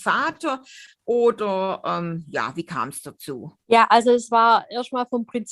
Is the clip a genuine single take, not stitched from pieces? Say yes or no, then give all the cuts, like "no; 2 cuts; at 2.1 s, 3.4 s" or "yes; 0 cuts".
no; 1 cut; at 3.6 s